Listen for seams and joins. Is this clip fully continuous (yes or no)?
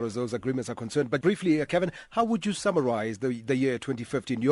no